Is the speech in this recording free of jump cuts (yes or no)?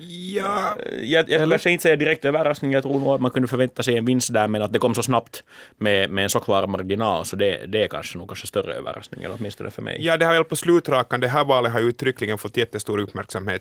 yes